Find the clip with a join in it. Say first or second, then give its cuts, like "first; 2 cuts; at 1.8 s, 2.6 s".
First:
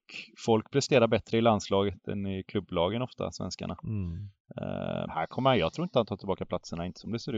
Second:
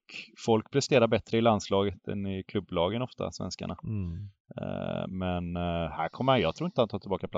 first; 1 cut; at 5.1 s